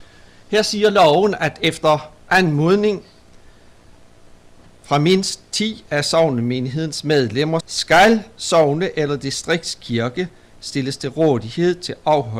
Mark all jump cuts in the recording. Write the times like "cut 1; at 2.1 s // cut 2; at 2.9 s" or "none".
cut 1; at 7.6 s